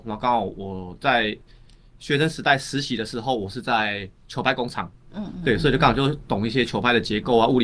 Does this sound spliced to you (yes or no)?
no